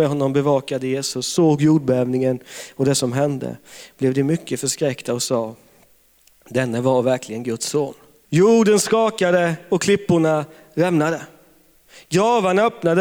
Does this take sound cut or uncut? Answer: cut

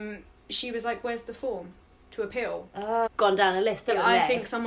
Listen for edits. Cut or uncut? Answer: cut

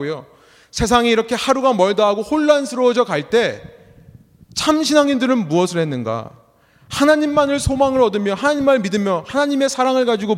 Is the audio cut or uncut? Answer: uncut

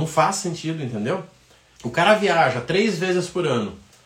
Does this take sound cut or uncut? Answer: cut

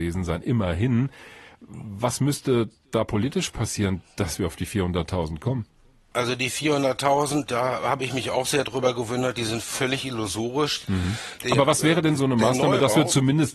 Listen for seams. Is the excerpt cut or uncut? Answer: uncut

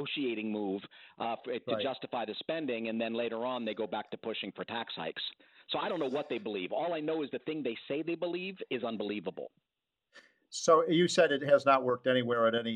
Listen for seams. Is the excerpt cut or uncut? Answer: uncut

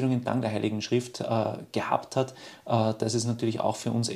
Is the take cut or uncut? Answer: uncut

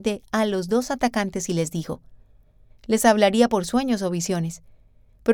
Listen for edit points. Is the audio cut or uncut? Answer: cut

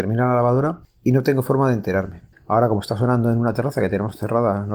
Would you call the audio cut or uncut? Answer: cut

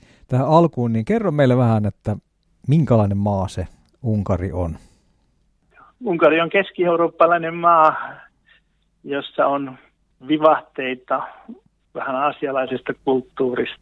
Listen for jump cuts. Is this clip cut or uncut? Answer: uncut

